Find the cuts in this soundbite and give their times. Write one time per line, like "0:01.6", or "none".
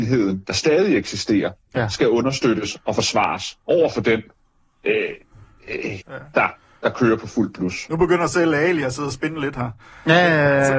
0:06.0